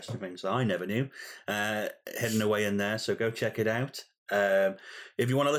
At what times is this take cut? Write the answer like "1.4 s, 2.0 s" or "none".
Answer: none